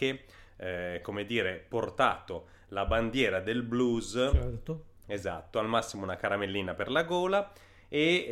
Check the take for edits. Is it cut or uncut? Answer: cut